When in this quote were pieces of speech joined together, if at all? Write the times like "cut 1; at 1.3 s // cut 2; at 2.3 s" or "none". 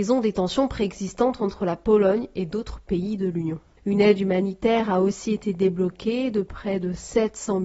cut 1; at 3.8 s